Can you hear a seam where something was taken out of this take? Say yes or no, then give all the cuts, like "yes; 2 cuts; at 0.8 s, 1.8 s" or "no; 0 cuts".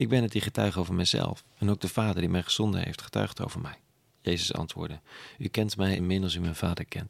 yes; 2 cuts; at 4.1 s, 6.0 s